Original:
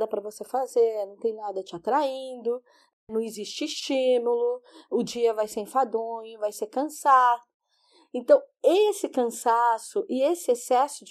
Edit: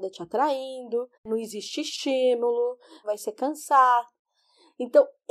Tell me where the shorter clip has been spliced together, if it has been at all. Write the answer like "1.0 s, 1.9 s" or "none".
1.1 s, 3.0 s